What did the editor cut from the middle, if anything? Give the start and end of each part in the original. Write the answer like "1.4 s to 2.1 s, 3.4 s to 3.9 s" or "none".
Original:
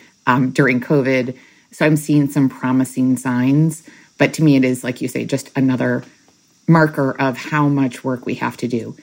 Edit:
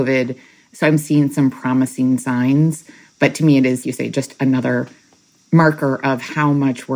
4.8 s to 5.0 s